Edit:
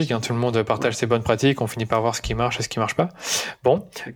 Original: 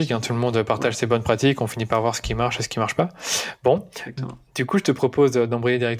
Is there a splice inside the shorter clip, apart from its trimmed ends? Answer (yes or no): no